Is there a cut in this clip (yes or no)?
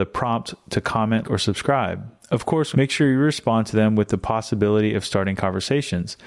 yes